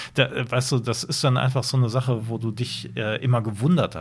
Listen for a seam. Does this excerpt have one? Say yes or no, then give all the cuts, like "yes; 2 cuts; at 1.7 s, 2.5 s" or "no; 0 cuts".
no; 0 cuts